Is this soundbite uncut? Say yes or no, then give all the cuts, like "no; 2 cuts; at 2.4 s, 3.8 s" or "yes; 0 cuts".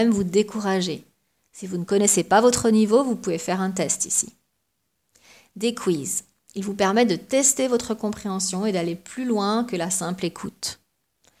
yes; 0 cuts